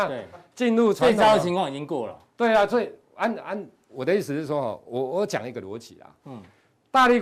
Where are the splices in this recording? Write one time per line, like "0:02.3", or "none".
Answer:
none